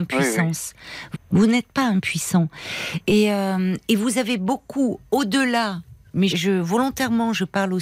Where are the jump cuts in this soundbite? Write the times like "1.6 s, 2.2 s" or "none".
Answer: 1.1 s, 6.3 s